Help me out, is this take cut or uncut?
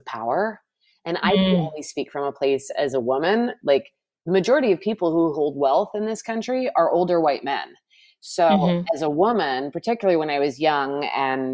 uncut